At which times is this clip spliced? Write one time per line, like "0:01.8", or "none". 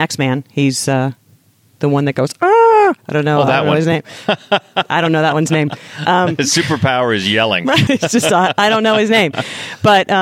0:07.9

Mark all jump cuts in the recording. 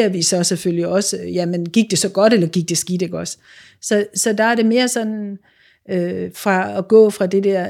none

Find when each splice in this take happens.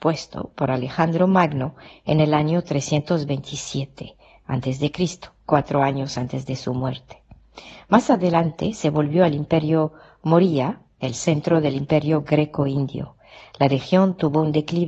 none

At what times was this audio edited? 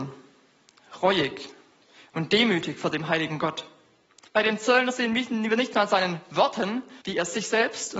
0:04.3
0:07.0

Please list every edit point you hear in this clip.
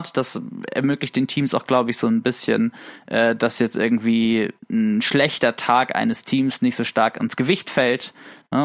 none

